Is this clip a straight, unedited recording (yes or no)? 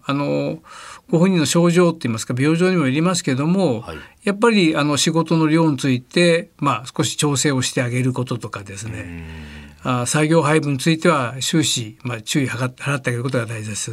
yes